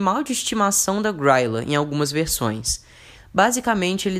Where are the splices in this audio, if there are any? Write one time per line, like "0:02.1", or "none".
0:03.1